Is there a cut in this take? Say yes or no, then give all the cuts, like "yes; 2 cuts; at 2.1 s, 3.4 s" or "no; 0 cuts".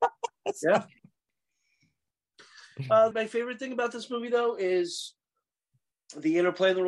yes; 1 cut; at 3.1 s